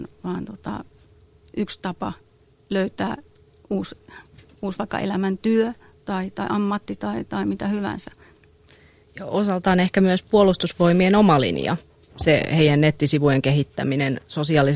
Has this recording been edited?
no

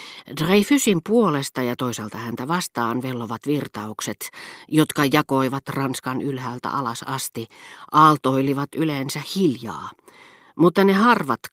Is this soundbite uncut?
yes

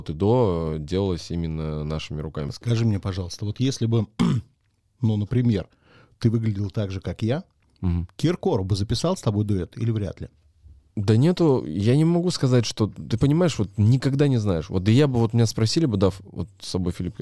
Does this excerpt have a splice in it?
no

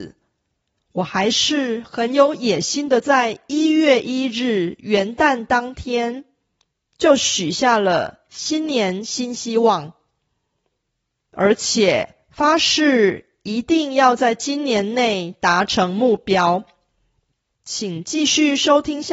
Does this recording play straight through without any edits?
no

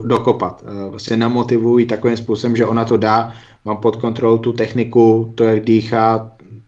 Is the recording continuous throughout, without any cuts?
yes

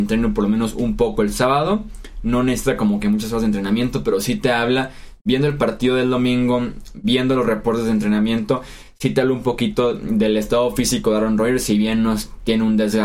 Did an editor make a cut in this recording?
no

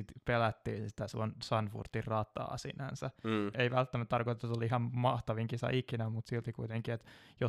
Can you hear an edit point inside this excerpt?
yes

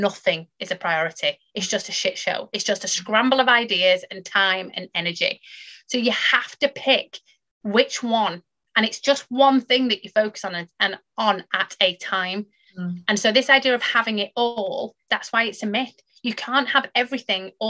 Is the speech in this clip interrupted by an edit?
no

